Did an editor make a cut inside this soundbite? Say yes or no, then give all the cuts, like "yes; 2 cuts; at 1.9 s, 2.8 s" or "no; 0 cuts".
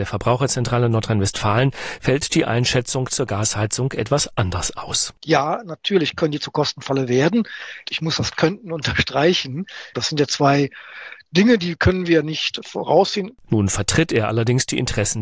yes; 2 cuts; at 9.9 s, 13.4 s